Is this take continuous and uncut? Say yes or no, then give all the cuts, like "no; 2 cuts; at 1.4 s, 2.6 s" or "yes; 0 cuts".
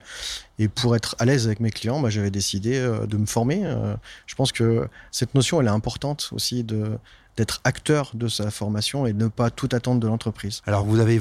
yes; 0 cuts